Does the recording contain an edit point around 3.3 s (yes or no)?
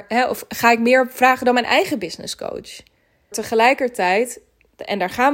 yes